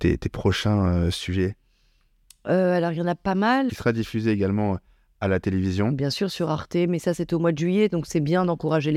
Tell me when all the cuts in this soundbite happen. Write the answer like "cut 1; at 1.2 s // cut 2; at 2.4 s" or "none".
cut 1; at 3.7 s